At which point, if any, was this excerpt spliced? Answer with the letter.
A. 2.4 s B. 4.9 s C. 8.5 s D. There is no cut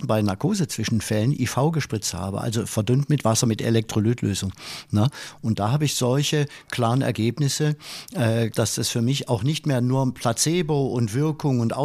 C